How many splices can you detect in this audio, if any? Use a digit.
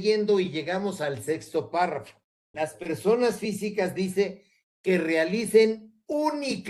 1